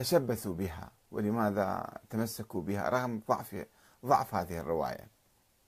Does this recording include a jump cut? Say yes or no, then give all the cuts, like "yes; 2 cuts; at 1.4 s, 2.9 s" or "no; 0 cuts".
no; 0 cuts